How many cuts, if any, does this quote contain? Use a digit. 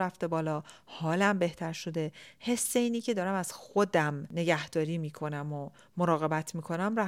0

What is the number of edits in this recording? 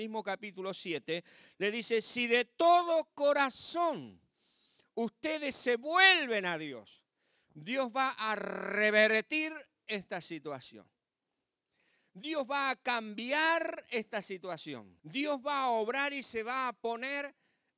1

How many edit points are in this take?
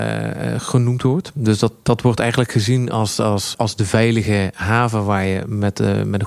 1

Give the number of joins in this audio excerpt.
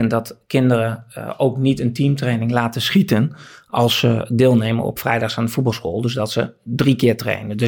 0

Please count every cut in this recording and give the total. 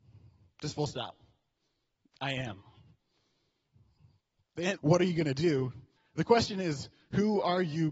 2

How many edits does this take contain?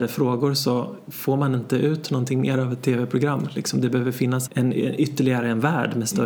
1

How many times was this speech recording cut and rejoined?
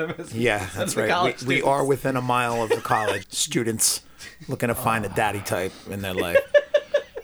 1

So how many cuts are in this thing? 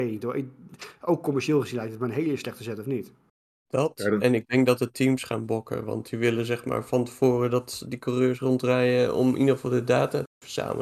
0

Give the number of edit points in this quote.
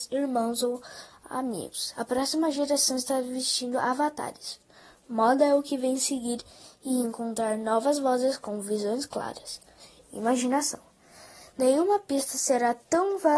1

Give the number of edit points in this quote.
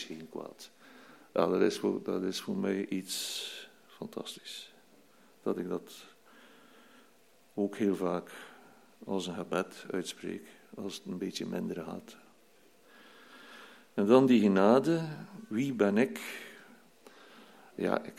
0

